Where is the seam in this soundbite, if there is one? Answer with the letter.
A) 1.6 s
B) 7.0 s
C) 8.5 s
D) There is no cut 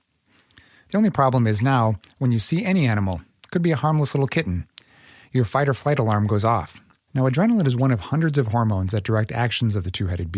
B